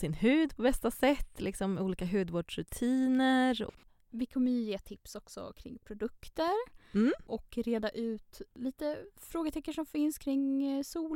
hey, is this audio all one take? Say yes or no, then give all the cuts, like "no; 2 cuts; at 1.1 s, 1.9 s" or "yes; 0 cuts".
yes; 0 cuts